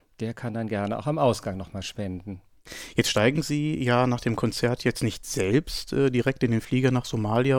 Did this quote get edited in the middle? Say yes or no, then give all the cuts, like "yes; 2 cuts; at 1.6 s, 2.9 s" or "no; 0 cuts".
no; 0 cuts